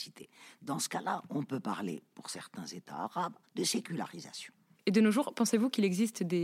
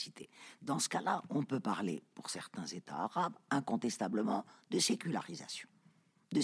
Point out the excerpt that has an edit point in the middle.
first; 2 cuts; at 3.4 s, 4.8 s

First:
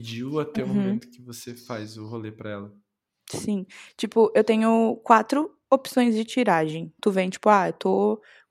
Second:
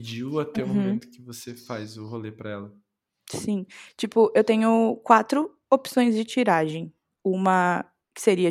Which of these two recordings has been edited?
first; 1 cut; at 7.0 s

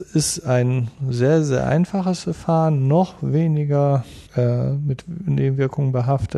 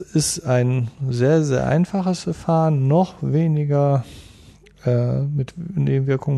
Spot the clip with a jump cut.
first; 1 cut; at 4.3 s

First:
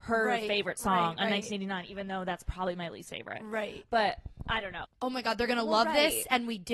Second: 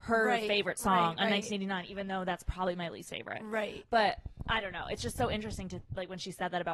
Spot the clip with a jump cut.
first; 1 cut; at 4.8 s

